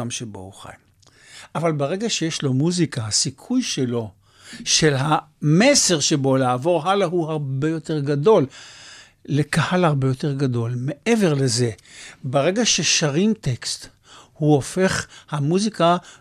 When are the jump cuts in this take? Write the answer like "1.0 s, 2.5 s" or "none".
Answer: none